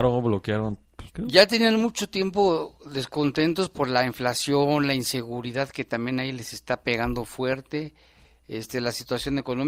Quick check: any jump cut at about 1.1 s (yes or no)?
yes